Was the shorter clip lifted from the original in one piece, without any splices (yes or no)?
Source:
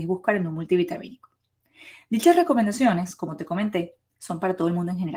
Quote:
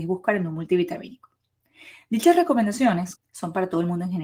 no